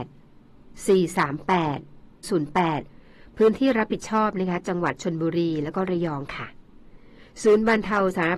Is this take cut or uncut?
cut